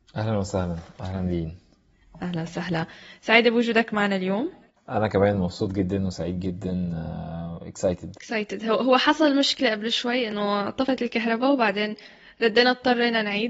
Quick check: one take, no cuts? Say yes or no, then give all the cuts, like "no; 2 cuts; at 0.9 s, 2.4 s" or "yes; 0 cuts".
no; 1 cut; at 8.1 s